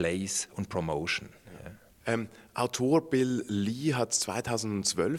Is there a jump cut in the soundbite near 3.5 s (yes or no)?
no